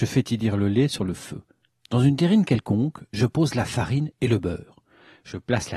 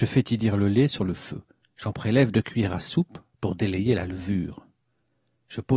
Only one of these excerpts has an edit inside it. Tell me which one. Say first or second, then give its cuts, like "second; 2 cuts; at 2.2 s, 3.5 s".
first; 1 cut; at 1.7 s